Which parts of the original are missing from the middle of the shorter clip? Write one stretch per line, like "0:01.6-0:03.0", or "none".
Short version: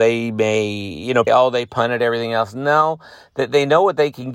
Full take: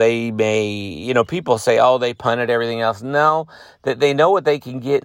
0:01.3-0:01.7